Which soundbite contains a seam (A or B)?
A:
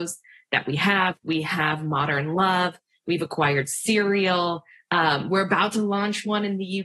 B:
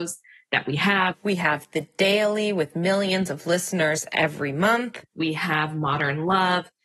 A